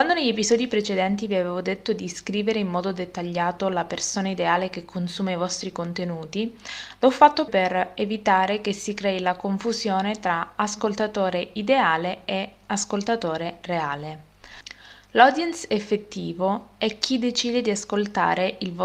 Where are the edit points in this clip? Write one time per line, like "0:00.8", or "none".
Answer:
0:07.5